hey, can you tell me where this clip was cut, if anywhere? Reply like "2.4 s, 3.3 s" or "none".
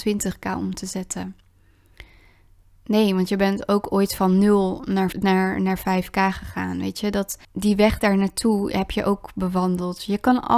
5.1 s, 7.4 s